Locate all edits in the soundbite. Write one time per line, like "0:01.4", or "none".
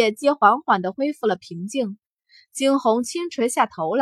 none